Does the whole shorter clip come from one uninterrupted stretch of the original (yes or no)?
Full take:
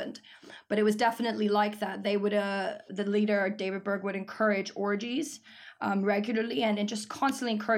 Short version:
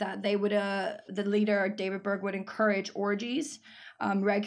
yes